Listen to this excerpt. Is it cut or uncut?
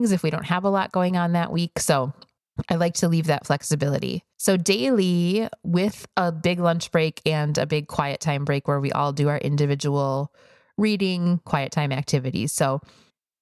cut